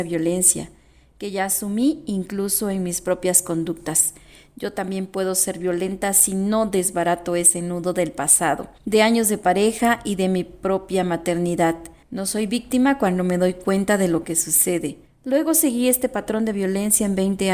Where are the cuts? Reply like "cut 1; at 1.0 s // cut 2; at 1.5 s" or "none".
cut 1; at 15.0 s